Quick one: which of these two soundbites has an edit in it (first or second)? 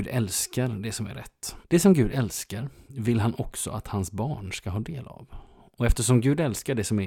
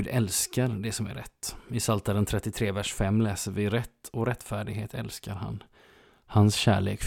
first